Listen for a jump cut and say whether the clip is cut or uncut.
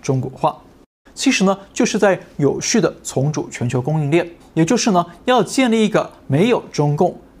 cut